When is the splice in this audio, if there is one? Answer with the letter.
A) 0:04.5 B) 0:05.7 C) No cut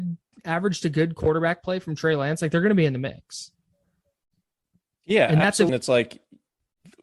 B